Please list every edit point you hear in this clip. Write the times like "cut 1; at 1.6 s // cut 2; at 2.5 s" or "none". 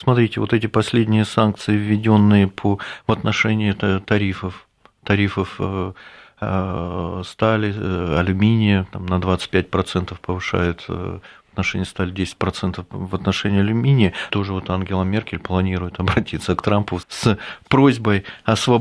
cut 1; at 14.3 s // cut 2; at 17.0 s